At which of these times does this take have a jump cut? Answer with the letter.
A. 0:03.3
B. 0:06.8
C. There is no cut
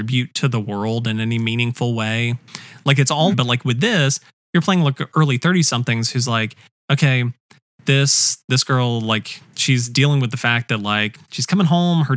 A